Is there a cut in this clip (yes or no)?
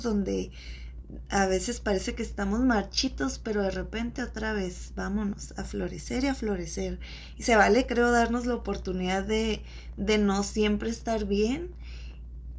no